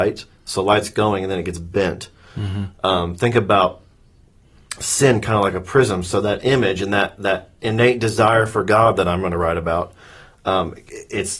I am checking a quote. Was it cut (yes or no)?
no